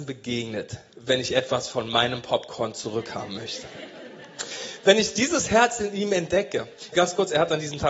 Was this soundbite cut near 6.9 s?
yes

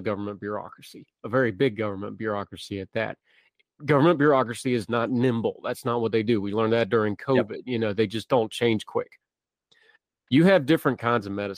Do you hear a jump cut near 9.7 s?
no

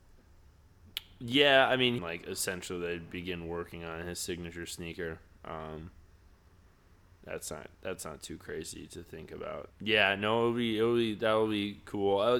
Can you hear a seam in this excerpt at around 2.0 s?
yes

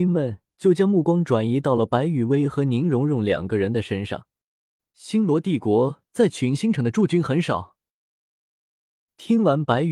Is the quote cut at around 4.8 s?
yes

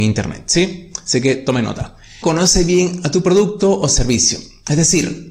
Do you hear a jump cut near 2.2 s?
yes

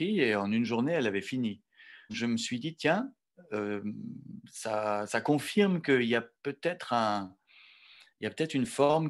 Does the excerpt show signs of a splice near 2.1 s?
yes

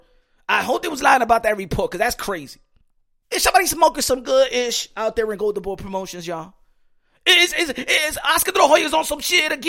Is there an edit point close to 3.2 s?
yes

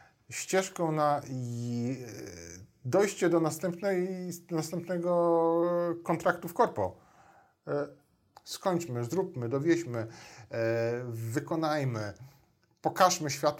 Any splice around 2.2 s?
no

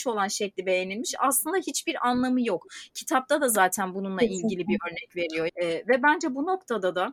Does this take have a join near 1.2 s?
no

